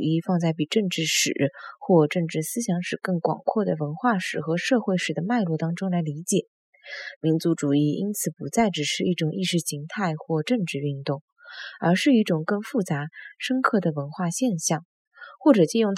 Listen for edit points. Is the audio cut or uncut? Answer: uncut